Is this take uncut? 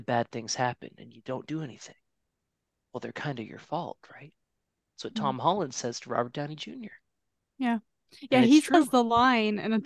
yes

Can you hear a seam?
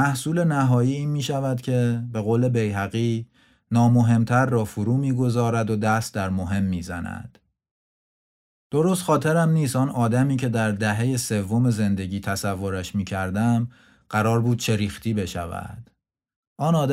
no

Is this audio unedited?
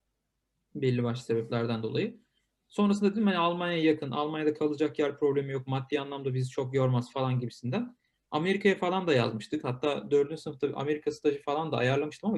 no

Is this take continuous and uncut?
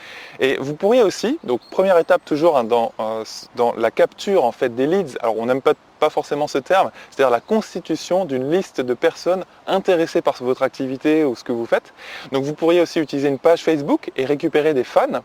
yes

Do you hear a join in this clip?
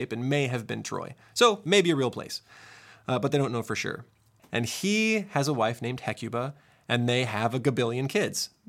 yes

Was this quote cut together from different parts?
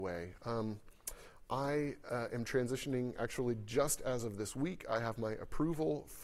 no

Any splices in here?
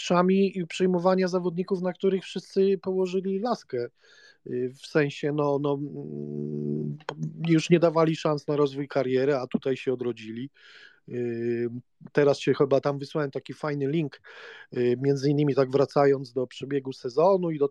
no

